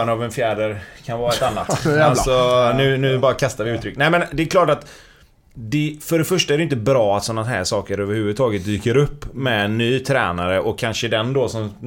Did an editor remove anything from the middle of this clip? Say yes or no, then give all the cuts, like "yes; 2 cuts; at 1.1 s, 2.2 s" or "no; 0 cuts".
no; 0 cuts